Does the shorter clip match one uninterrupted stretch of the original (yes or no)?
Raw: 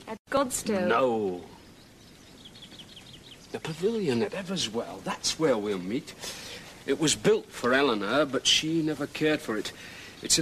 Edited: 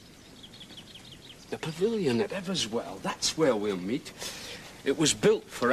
yes